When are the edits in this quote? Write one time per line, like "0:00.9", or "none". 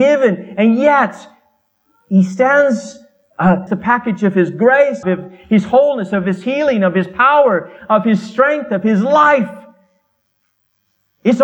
0:03.7
0:05.0